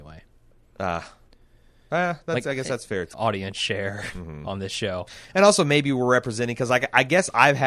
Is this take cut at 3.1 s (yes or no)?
yes